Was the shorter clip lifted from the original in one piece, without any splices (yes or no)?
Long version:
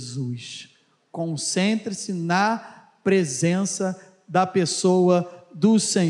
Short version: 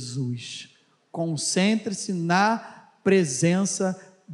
yes